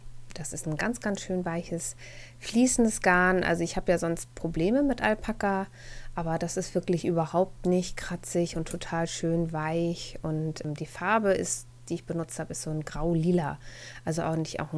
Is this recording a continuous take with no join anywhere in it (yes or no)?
yes